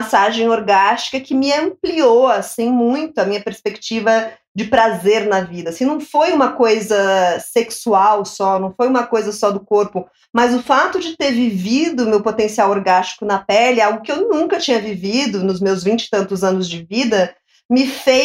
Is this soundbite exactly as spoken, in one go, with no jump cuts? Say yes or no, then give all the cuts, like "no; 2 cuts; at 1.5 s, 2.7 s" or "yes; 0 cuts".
yes; 0 cuts